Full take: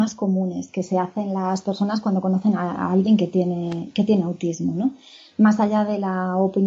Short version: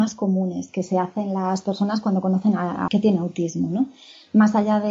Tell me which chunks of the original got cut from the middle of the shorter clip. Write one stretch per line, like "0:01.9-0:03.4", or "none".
0:02.9-0:03.9